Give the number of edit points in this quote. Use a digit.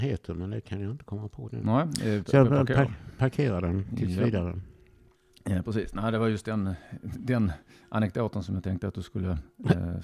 1